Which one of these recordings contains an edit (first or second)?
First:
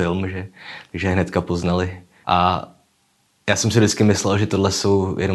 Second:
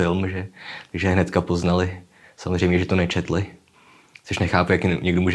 first